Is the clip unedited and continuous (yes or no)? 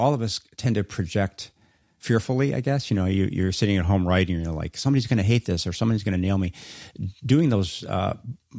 yes